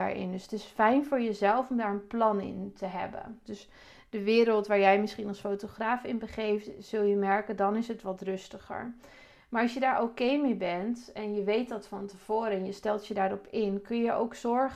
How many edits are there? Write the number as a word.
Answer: one